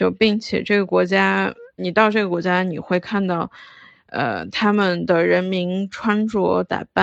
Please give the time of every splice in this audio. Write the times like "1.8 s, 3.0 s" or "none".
1.8 s

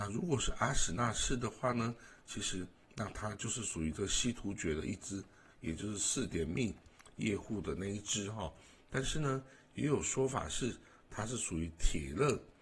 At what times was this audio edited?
none

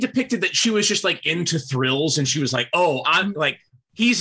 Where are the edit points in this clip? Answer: 3.0 s

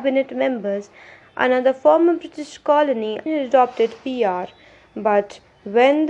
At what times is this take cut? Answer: 1.2 s, 3.3 s

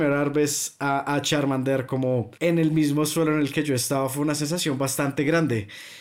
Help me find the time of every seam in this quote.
2.4 s

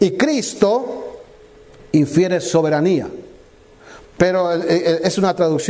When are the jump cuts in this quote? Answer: 4.0 s

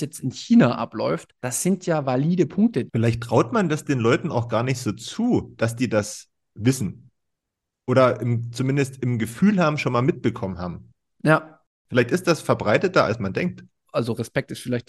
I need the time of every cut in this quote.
1.4 s, 2.9 s, 13.9 s

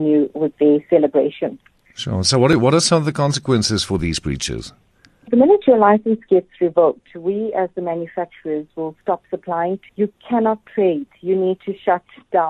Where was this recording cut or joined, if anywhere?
5.3 s, 9.9 s

